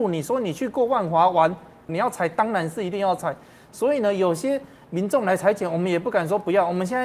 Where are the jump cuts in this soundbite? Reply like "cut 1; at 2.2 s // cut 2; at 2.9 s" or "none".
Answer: cut 1; at 1.9 s